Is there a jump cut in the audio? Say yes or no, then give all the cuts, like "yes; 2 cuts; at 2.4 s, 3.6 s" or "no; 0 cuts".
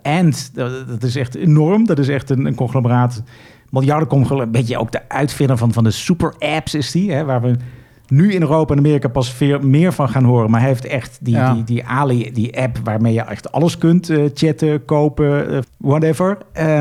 yes; 1 cut; at 15.6 s